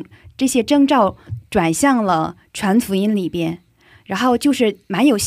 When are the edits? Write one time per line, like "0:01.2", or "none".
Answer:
0:01.3